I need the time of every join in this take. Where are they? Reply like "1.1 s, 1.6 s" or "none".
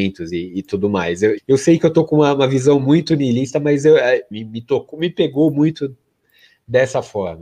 1.4 s, 4.3 s